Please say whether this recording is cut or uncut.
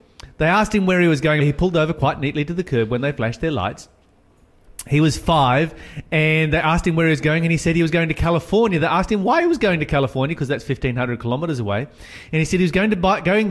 cut